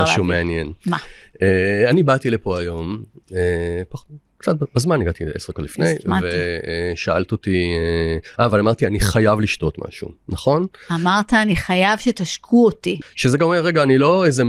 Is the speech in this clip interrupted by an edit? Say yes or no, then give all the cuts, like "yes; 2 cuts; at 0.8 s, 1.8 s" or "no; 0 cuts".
yes; 1 cut; at 13.0 s